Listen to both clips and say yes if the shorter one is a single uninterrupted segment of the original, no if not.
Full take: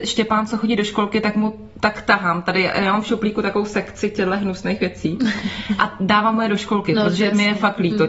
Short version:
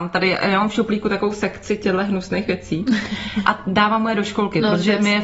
yes